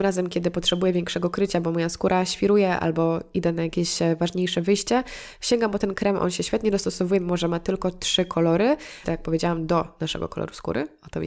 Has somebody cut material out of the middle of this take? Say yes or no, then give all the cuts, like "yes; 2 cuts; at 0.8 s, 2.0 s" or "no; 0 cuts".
yes; 1 cut; at 9.0 s